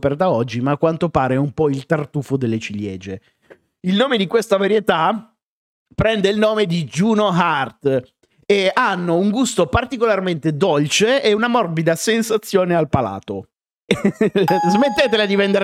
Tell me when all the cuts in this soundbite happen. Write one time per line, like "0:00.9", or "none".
0:13.9

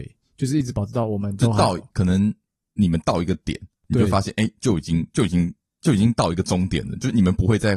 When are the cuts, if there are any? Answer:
none

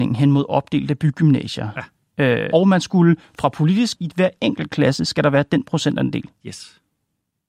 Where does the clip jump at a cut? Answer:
0:02.5
0:03.9

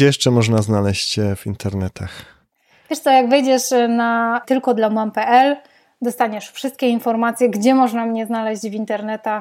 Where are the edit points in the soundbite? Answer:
none

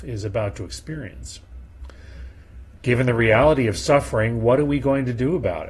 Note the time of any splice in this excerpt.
0:02.8

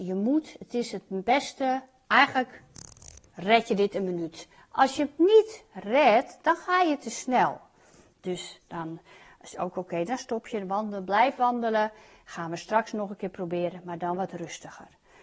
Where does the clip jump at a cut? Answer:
none

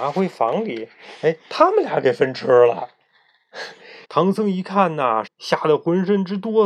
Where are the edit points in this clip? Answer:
0:04.0
0:05.3

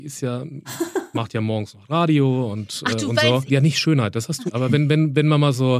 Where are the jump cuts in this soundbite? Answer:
0:03.5
0:04.5

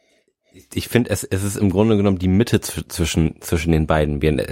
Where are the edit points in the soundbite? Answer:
none

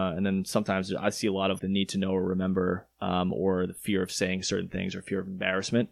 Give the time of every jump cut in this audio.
0:01.6

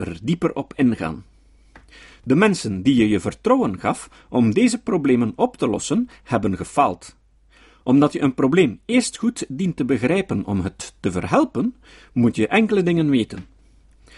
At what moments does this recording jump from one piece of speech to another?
none

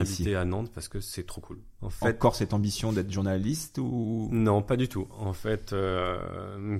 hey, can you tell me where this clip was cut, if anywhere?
0:01.8

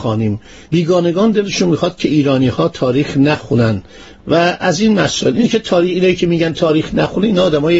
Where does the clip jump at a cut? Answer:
none

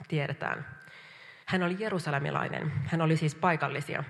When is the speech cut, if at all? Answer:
0:01.4

